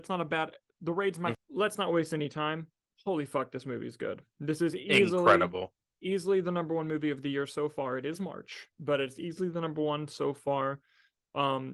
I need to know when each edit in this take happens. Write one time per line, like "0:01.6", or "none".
0:01.3
0:08.7